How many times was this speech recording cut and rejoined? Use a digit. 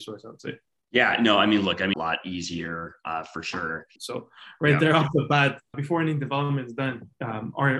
3